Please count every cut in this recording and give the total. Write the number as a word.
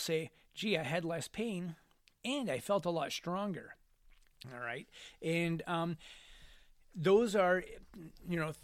one